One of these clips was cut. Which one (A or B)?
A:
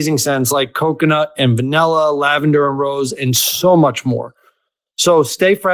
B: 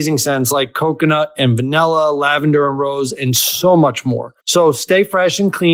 B